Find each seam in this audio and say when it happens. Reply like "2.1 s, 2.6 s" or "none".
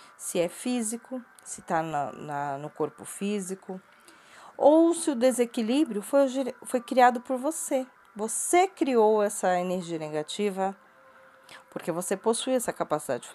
none